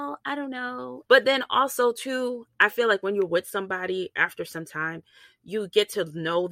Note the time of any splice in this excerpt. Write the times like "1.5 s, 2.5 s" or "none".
1.1 s